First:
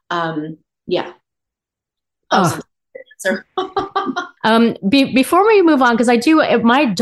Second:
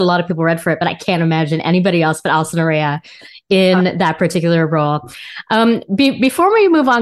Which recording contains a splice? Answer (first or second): first